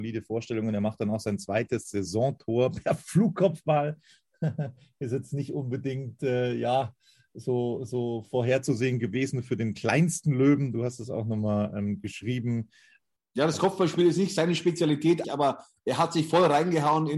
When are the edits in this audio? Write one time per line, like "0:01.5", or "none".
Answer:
0:13.2
0:15.2